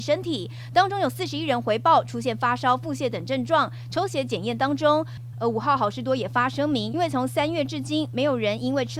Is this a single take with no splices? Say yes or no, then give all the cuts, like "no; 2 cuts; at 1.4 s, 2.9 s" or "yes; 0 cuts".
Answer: no; 2 cuts; at 5.3 s, 6.9 s